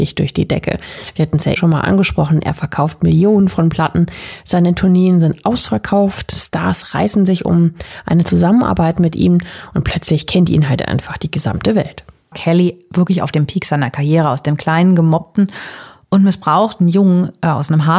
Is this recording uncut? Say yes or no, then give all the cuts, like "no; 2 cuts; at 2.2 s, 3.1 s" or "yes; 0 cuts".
no; 2 cuts; at 1.6 s, 12.3 s